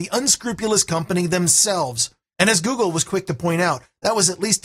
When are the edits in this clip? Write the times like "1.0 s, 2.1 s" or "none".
2.2 s